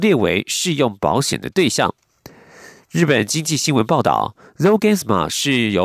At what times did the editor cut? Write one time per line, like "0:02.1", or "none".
none